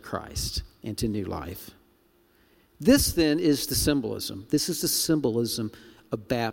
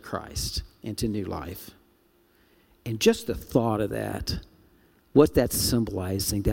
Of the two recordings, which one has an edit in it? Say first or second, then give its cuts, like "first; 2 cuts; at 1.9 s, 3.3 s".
first; 1 cut; at 2.7 s